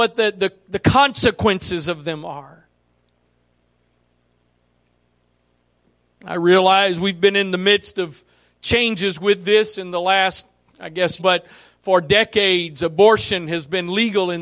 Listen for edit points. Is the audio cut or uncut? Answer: cut